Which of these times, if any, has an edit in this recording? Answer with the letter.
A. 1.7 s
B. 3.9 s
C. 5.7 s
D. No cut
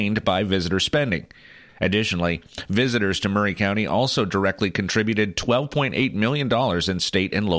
A